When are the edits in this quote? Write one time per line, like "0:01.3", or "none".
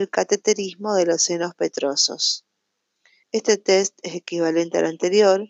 0:03.2

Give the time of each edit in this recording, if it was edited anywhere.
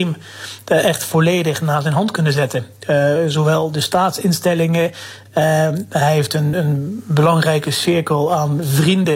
0:06.5

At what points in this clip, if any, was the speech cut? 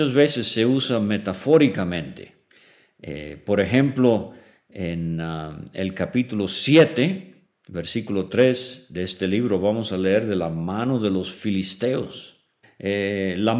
0:12.6

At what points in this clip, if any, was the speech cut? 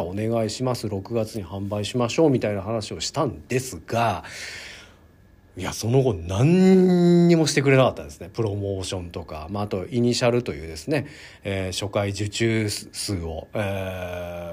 0:05.7

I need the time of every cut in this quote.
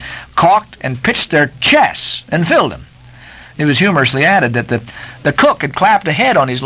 none

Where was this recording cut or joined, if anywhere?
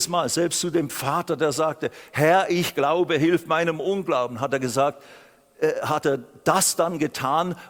none

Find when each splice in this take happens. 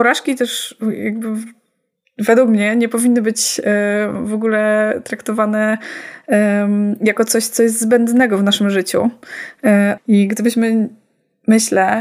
0:10.0

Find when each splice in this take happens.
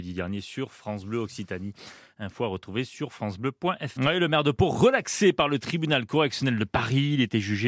0:04.0

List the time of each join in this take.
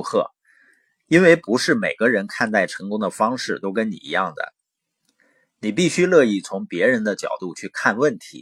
none

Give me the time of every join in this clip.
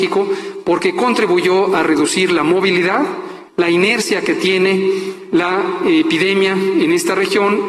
0:03.5

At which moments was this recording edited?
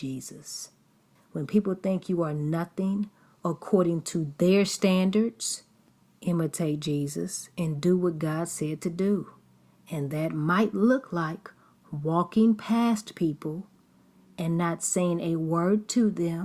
0:01.2

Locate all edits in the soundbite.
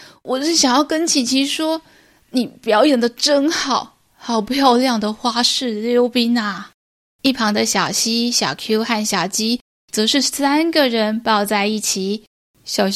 none

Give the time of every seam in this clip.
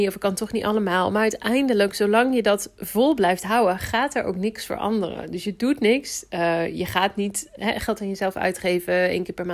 0:07.6

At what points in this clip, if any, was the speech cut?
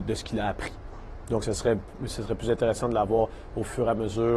none

